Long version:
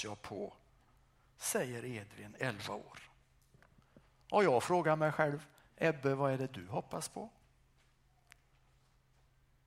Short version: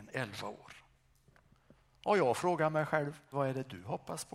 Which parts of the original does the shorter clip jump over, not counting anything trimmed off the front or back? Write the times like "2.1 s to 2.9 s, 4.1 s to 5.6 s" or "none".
5.6 s to 6.2 s